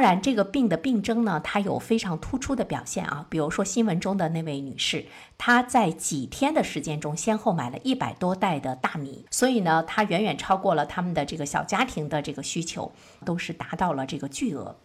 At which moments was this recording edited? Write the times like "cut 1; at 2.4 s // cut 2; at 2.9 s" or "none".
cut 1; at 9.3 s // cut 2; at 13.2 s